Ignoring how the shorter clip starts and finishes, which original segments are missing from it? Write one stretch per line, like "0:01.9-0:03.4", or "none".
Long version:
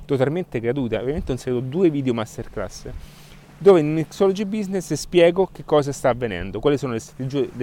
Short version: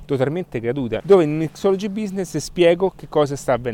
0:01.0-0:03.6